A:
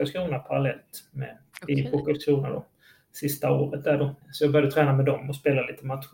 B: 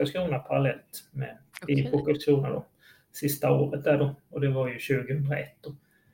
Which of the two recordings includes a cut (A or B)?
A